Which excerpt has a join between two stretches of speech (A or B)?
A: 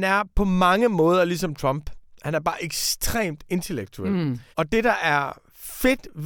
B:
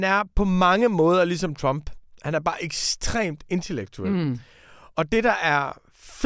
A